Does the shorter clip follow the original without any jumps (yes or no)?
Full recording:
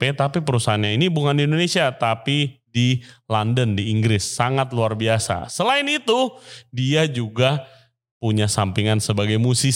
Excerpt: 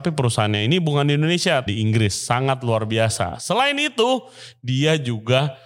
no